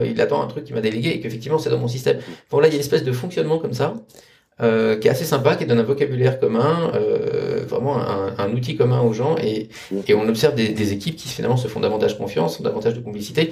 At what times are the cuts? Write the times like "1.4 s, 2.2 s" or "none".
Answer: none